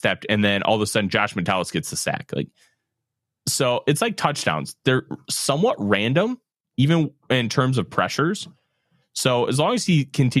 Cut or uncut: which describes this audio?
uncut